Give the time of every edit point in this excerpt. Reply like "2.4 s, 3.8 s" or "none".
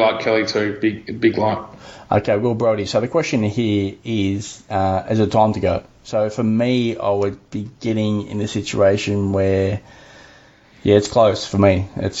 none